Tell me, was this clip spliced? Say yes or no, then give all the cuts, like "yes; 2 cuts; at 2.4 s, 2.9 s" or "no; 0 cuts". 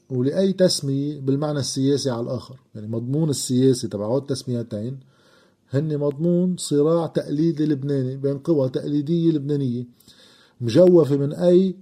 no; 0 cuts